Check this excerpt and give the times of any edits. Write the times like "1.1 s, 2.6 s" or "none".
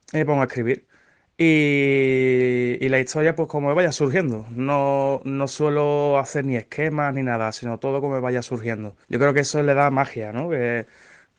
9.0 s